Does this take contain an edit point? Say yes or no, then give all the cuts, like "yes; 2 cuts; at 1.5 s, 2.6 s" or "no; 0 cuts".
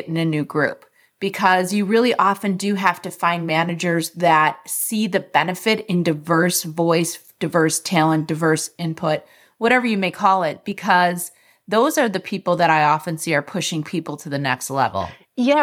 no; 0 cuts